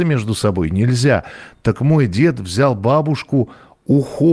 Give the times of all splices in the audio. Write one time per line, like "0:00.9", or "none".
none